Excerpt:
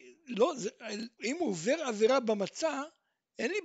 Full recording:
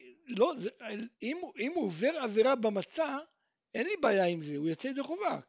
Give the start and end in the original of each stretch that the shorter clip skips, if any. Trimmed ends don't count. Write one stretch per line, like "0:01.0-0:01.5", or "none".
0:01.2-0:01.5